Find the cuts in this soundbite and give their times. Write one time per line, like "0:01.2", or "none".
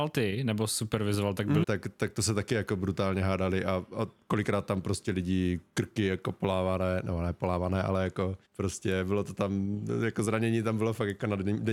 0:01.6
0:08.4